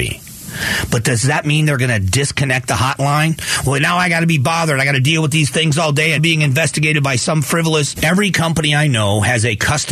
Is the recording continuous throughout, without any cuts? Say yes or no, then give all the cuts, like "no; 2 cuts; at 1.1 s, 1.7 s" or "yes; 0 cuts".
no; 2 cuts; at 6.2 s, 8.0 s